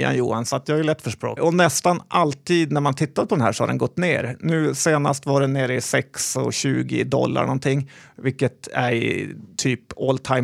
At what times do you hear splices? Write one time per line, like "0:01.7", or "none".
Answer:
0:01.4